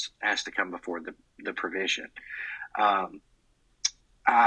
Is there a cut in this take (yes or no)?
no